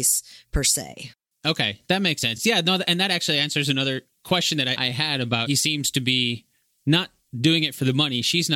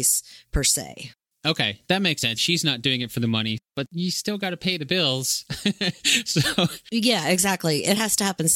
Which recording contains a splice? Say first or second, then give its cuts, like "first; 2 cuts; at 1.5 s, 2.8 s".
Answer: second; 1 cut; at 2.4 s